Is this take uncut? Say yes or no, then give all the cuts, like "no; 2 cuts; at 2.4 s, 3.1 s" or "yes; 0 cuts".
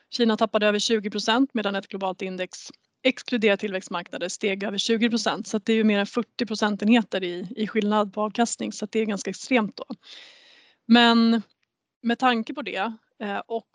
yes; 0 cuts